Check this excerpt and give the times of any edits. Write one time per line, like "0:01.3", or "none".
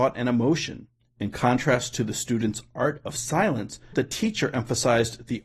0:01.0
0:03.9